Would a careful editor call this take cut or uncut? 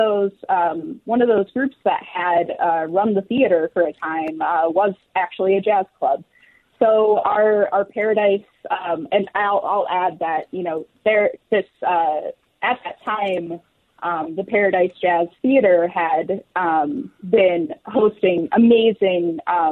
uncut